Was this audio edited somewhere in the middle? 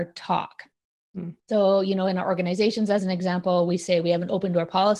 no; 0 cuts

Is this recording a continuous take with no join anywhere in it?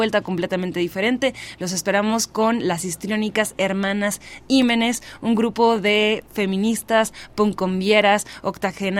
yes; 0 cuts

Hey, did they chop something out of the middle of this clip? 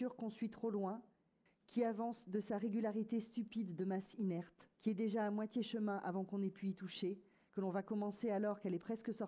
yes; 2 cuts; at 1.5 s, 4.7 s

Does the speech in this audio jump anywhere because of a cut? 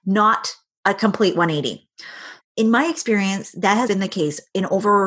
yes; 2 cuts; at 2.4 s, 3.9 s

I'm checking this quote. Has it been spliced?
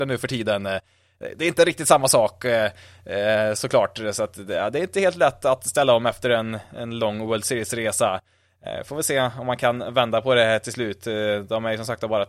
no; 0 cuts

